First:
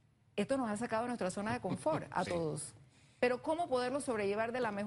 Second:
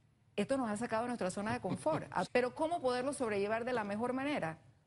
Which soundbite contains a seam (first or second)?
second